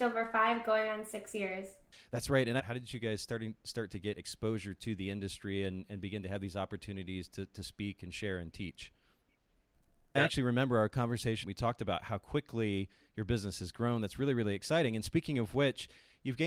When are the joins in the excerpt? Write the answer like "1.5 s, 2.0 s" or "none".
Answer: 2.6 s, 10.1 s, 11.4 s

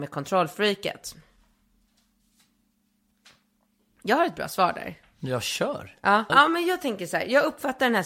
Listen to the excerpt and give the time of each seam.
6.3 s

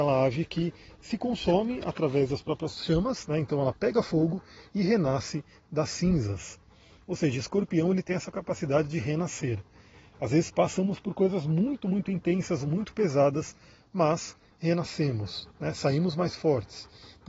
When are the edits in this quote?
none

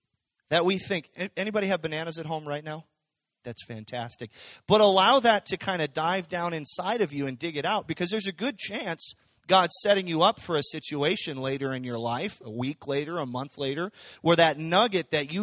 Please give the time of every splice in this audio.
3.4 s

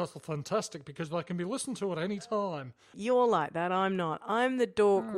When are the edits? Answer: 2.9 s

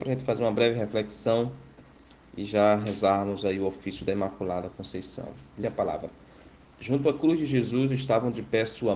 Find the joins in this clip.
5.6 s

